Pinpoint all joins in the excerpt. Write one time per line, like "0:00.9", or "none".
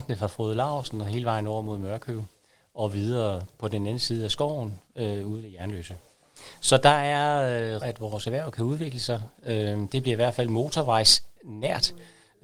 0:07.8